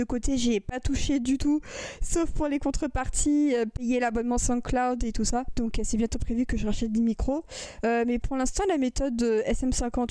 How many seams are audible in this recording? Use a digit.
0